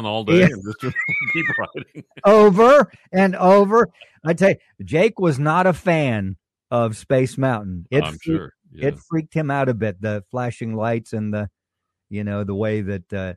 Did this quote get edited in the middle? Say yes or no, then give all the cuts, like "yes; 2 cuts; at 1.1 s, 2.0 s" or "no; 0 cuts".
no; 0 cuts